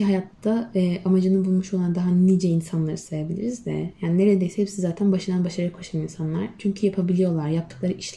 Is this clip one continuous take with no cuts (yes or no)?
yes